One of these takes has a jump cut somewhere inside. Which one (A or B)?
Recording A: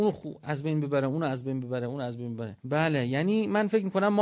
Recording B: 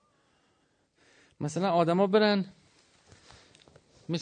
A